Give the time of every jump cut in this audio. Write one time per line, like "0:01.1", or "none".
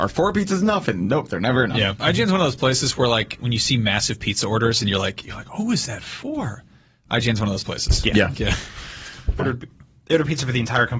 0:08.3
0:09.4

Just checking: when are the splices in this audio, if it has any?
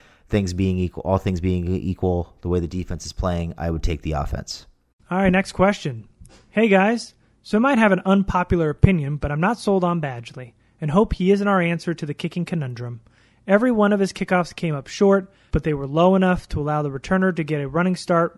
0:15.5

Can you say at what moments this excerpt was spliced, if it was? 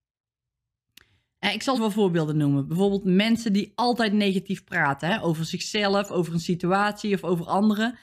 0:01.7

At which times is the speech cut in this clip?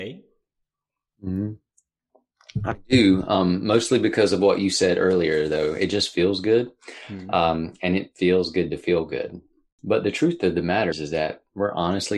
0:09.7
0:10.9

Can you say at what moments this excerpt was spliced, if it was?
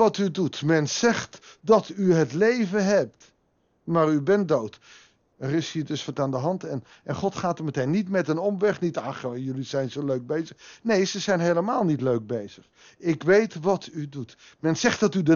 0:05.3

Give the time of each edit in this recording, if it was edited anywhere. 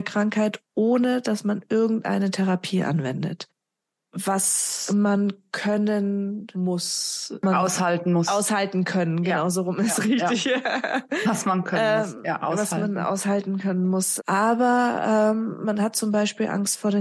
0:14.2

